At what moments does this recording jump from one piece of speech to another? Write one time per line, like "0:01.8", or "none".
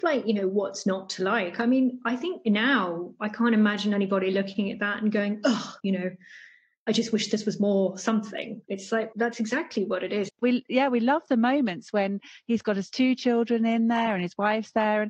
0:05.8
0:09.1
0:10.3